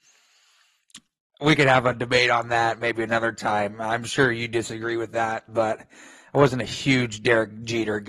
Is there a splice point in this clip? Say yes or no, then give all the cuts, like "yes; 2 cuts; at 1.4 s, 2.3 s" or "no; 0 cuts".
yes; 1 cut; at 5.5 s